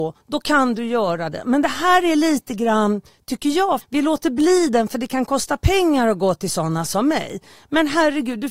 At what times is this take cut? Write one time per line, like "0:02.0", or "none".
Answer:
0:03.8